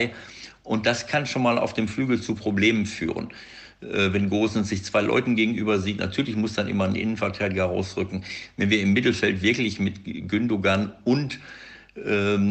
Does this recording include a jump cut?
no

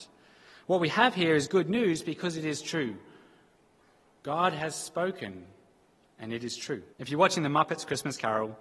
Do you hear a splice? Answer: yes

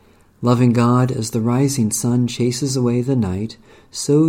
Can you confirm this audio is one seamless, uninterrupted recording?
yes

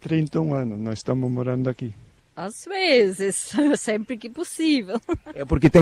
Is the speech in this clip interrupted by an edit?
yes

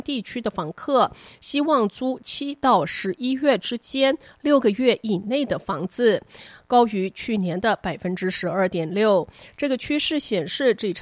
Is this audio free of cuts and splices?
yes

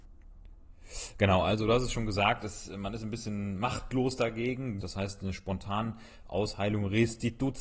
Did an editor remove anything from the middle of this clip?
yes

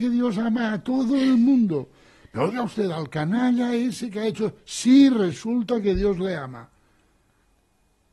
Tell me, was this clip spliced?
no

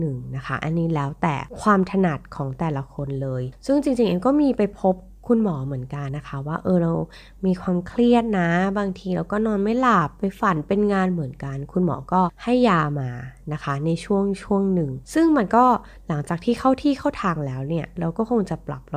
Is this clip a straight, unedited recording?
no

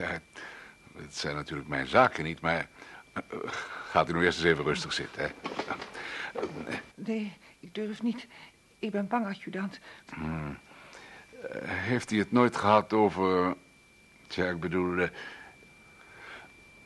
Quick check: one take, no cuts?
no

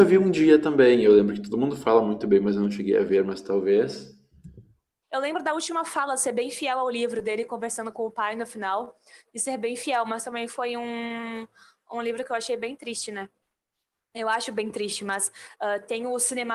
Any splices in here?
yes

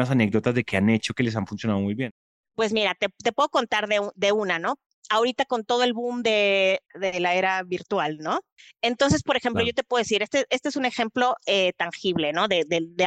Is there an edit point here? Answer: no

